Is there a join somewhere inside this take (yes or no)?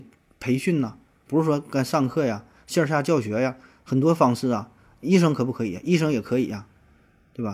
no